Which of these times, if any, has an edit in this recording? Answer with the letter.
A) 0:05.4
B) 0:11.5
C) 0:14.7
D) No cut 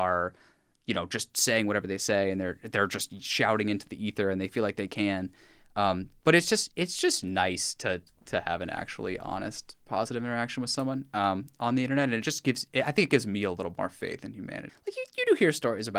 C